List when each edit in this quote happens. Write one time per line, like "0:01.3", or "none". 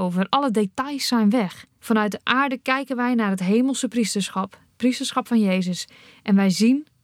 0:01.8